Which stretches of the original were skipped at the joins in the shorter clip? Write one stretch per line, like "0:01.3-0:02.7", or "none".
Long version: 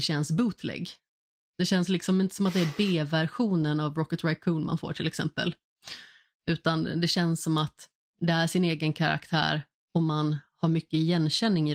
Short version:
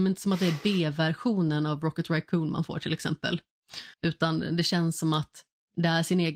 0:06.1-0:06.4